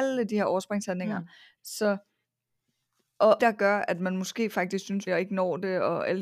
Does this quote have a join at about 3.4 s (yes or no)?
yes